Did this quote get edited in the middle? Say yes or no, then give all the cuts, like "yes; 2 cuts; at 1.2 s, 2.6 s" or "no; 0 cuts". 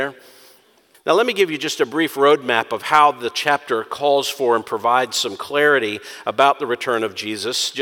yes; 1 cut; at 0.9 s